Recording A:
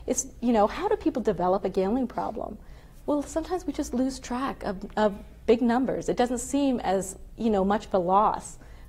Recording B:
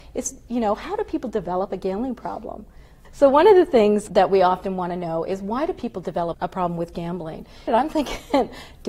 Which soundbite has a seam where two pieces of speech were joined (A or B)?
B